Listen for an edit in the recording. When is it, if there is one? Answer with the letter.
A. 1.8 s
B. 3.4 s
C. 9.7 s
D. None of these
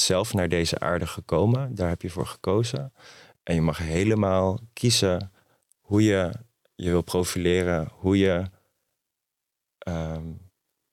D